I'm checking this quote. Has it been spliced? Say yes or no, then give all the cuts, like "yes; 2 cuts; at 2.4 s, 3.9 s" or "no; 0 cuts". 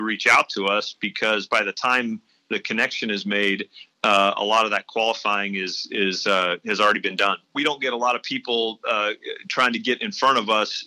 yes; 1 cut; at 7.5 s